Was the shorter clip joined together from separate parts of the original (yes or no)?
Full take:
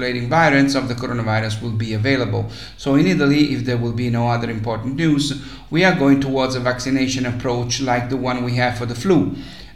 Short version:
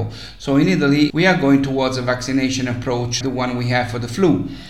yes